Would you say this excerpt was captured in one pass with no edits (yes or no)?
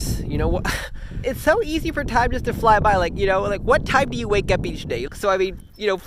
no